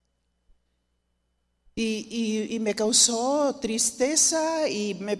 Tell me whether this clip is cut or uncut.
uncut